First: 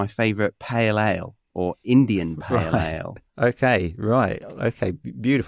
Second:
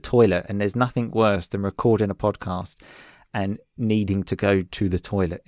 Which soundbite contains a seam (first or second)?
first